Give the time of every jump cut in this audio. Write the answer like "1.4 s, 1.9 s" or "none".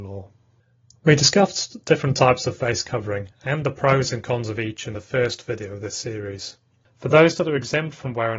6.8 s